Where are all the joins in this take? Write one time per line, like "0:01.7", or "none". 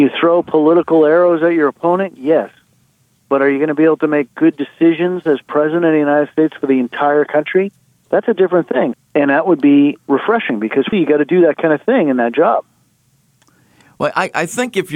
0:08.9
0:10.9